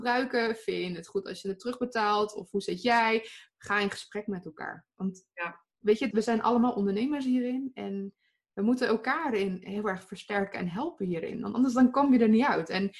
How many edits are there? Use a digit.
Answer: 1